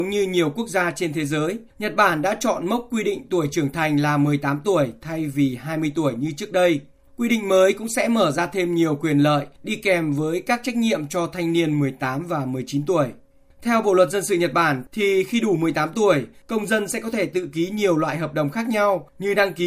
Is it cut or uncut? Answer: uncut